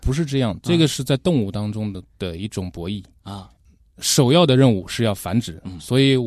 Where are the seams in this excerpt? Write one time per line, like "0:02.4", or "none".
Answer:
none